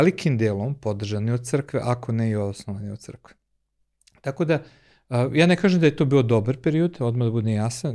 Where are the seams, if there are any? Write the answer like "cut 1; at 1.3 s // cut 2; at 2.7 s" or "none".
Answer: none